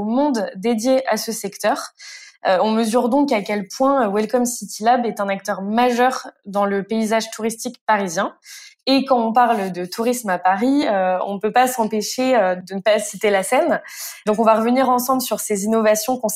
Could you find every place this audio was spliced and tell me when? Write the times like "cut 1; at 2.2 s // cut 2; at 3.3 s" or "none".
none